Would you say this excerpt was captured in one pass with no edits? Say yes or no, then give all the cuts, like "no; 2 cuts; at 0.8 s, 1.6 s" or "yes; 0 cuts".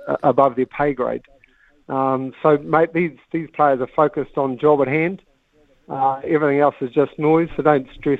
yes; 0 cuts